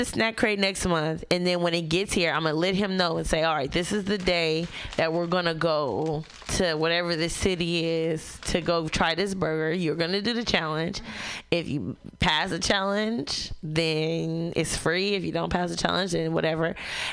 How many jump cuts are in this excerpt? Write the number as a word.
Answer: zero